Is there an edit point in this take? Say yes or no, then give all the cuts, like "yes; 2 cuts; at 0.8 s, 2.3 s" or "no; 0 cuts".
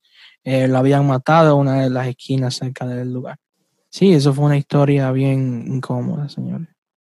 yes; 1 cut; at 3.9 s